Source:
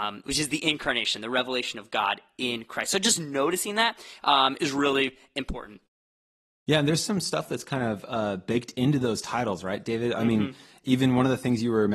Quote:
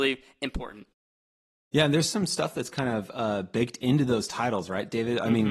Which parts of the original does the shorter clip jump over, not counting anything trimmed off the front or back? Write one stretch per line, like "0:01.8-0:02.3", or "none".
none